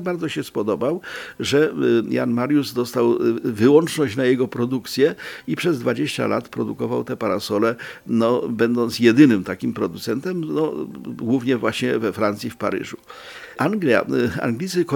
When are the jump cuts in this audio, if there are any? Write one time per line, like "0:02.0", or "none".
none